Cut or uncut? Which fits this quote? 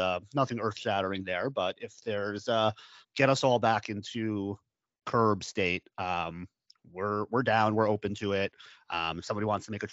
cut